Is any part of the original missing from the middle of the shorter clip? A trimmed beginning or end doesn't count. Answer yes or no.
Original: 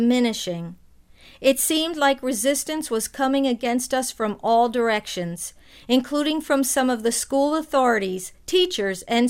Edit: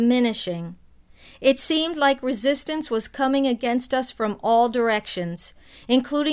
no